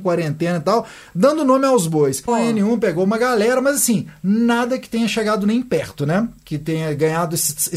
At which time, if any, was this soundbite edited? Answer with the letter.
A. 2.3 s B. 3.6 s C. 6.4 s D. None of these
A